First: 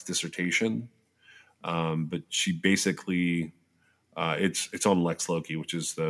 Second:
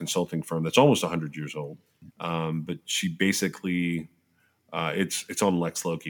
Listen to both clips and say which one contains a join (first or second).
second